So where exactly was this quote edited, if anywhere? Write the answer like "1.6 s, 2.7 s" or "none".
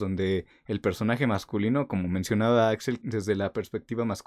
3.0 s